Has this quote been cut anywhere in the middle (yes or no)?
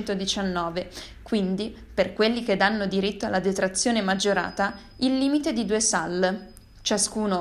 no